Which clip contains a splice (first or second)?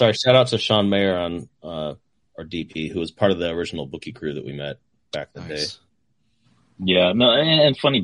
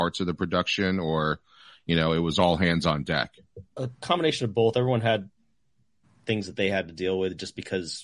second